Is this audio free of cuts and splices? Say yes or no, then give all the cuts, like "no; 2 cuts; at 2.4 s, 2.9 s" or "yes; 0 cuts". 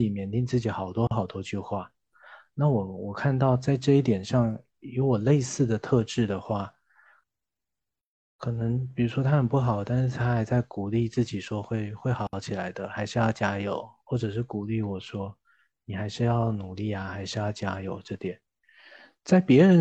yes; 0 cuts